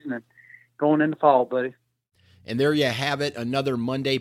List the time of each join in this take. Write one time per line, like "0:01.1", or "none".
none